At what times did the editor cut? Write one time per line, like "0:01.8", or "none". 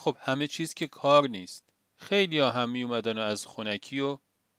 0:01.8